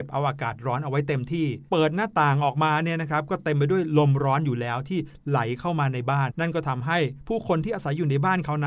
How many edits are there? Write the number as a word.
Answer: two